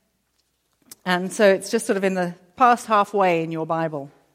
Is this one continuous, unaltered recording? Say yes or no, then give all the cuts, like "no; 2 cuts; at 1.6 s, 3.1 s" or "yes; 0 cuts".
no; 1 cut; at 2.5 s